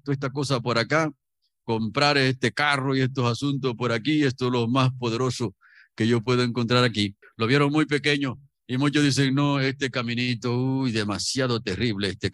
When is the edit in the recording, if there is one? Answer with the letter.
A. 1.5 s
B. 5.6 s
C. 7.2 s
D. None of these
C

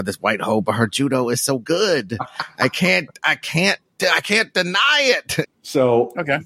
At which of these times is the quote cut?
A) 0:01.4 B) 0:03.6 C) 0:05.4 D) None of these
C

